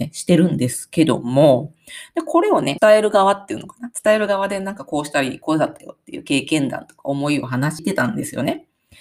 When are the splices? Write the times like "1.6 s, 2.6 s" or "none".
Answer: 2.8 s, 7.8 s